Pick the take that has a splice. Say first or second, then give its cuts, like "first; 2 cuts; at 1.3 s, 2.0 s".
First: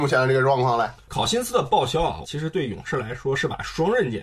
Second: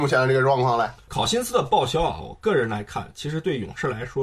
first; 1 cut; at 2.2 s